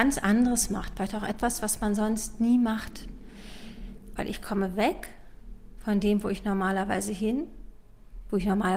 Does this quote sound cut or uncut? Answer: cut